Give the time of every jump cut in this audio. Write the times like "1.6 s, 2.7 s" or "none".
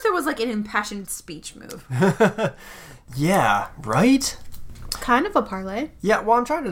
none